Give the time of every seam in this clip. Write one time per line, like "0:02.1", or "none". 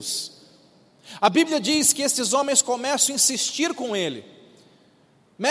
none